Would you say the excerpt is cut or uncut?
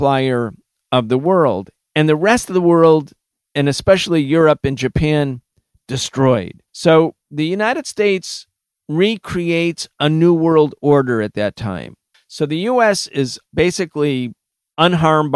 cut